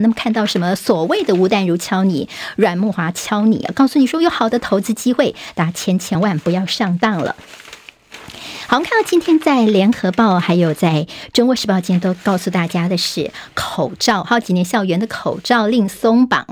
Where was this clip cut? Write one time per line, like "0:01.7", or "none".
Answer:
0:06.1
0:14.4